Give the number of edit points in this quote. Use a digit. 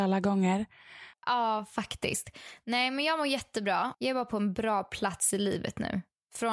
2